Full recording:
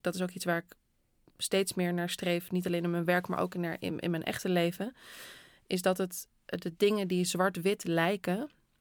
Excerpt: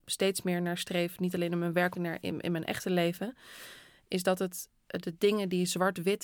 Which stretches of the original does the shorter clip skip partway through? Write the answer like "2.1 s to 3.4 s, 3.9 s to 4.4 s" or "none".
3.3 s to 3.5 s